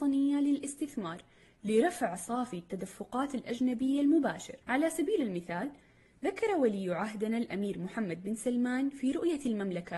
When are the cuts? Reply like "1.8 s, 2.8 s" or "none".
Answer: 4.6 s